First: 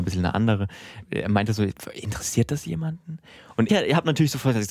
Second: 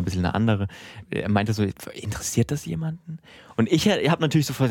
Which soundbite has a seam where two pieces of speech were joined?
first; 1 cut; at 3.7 s

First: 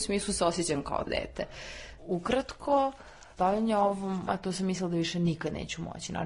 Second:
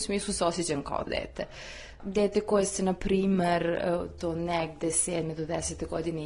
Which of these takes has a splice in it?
first; 2 cuts; at 2.0 s, 4.3 s

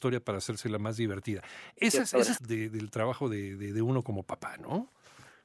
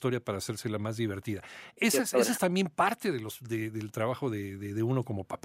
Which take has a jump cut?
first; 1 cut; at 2.4 s

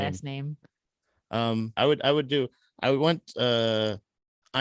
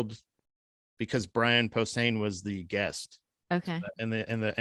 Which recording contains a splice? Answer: first; 1 cut; at 1.8 s

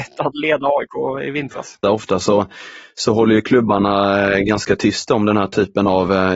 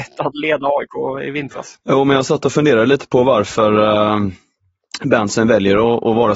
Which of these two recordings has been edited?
first; 1 cut; at 1.8 s

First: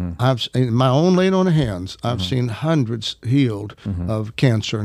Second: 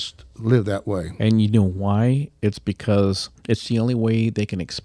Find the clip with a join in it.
second; 1 cut; at 3.4 s

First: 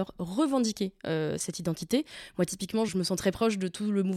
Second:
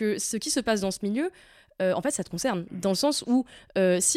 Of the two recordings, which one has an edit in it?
first; 1 cut; at 2.9 s

